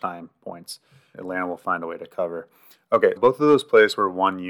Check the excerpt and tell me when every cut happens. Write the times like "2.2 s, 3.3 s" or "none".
1.1 s, 3.2 s